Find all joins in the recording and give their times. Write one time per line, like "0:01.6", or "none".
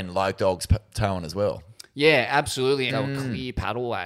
0:02.9